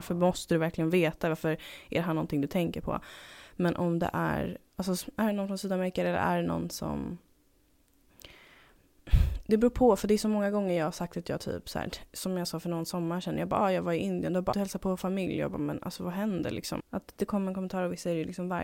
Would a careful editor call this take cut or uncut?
cut